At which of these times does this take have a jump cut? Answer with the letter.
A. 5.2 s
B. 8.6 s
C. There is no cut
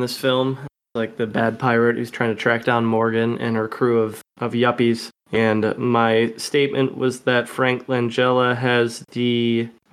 A